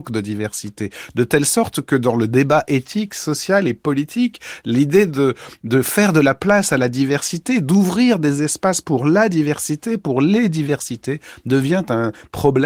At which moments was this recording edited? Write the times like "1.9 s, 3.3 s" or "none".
none